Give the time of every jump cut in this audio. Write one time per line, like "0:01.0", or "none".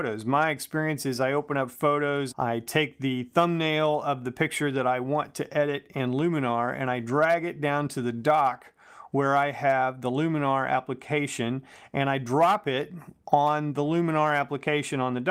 0:02.3